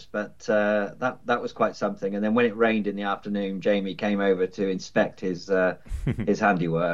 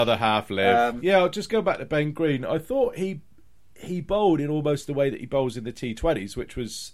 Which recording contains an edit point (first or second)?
second